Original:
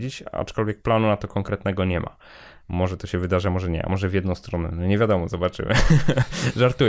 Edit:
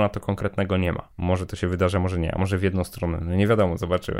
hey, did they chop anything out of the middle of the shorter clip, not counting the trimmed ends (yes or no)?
yes